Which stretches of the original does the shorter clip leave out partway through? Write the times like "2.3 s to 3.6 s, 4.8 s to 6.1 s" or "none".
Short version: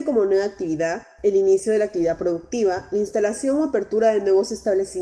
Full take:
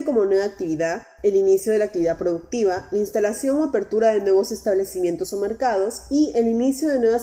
none